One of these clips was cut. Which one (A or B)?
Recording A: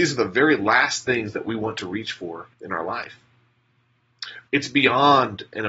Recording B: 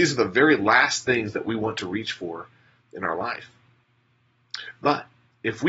A